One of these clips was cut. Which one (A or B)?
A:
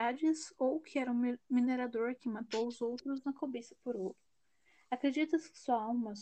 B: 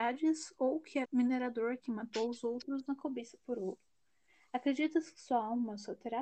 B